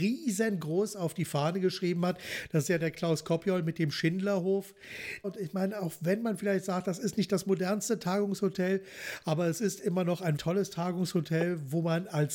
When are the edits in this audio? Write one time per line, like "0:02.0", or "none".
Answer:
0:05.2
0:10.4